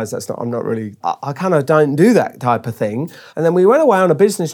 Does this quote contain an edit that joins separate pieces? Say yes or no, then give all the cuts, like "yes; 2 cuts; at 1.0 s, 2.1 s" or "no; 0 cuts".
yes; 2 cuts; at 1.0 s, 3.3 s